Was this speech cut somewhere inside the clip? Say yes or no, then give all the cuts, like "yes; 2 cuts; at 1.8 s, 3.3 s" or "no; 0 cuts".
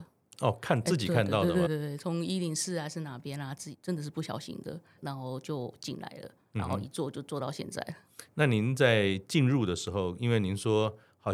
yes; 2 cuts; at 1.7 s, 5.0 s